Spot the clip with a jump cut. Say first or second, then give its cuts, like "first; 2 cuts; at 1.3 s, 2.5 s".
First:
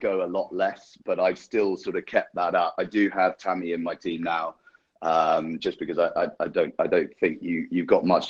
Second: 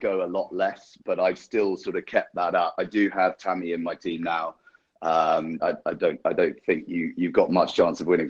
second; 1 cut; at 5.6 s